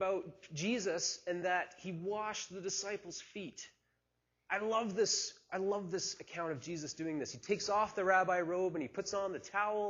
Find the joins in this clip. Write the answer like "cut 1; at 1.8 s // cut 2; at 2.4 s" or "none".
none